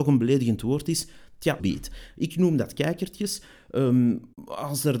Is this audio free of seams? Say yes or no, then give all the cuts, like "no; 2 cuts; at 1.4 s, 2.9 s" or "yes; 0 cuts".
no; 1 cut; at 1.6 s